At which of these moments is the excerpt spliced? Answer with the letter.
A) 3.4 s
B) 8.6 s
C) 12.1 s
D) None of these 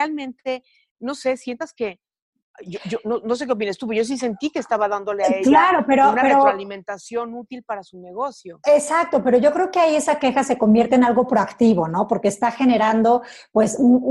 D